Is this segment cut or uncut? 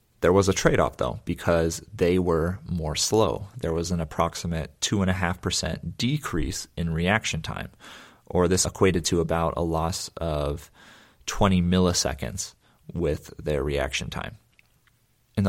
uncut